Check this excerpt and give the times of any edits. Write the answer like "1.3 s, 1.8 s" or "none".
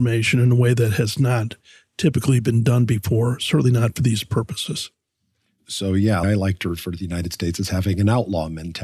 6.2 s